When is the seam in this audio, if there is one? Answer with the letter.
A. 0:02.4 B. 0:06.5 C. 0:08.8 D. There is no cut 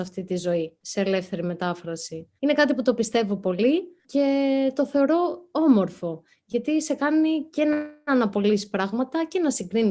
A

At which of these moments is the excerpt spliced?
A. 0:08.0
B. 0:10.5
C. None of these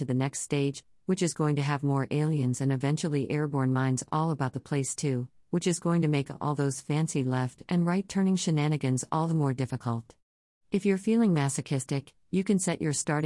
C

